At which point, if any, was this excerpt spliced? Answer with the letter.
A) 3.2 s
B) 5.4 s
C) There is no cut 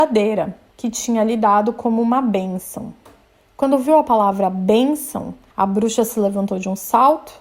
C